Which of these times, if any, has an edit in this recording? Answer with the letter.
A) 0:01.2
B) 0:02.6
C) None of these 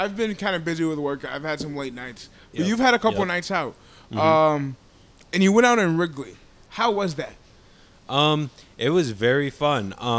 C